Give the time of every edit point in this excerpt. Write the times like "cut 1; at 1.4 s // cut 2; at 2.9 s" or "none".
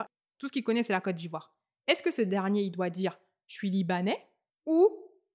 none